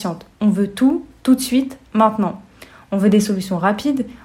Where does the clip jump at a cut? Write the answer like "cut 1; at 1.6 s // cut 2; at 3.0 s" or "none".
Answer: none